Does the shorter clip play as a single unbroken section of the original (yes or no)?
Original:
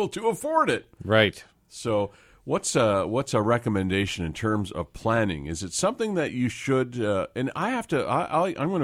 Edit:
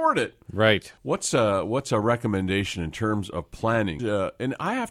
no